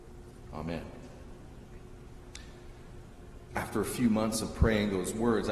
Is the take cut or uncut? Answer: cut